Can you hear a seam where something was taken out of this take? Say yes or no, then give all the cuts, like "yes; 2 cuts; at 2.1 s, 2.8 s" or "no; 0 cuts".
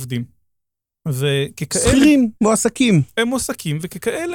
yes; 1 cut; at 2.4 s